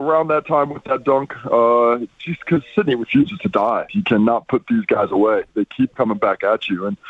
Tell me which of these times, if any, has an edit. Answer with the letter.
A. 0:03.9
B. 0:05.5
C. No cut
A